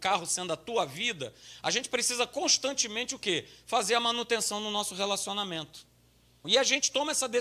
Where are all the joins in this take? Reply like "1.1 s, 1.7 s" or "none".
6.4 s